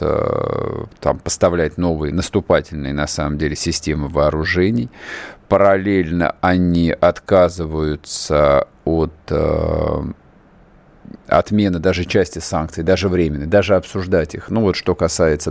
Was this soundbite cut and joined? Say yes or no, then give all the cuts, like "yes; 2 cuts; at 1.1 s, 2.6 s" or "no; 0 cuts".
no; 0 cuts